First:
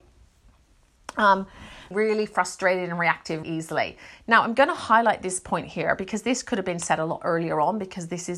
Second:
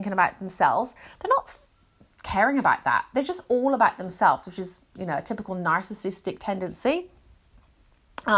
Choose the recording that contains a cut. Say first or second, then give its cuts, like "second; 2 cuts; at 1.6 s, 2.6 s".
first; 2 cuts; at 1.9 s, 3.4 s